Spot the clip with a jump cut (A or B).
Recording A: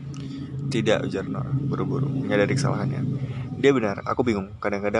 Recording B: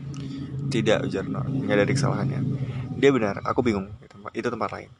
B